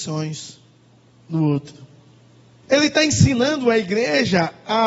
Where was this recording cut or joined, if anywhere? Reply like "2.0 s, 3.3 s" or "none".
2.6 s